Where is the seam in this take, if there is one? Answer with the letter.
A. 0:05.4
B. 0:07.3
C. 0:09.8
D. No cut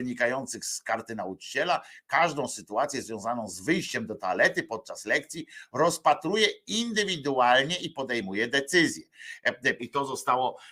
C